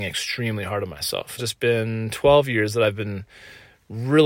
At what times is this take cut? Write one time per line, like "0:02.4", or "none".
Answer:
0:01.4